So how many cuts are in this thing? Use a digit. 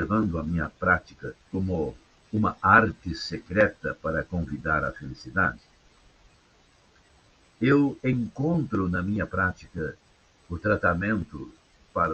1